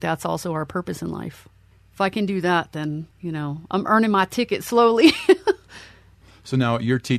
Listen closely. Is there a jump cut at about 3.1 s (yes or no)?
yes